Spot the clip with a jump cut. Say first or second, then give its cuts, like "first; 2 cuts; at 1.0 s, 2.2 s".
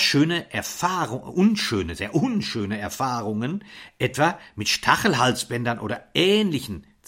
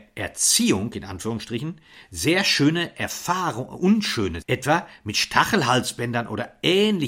second; 1 cut; at 4.4 s